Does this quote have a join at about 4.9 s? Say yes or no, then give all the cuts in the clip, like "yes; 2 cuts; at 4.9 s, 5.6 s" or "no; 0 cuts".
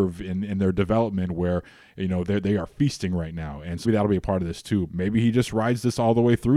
yes; 2 cuts; at 3.8 s, 4.9 s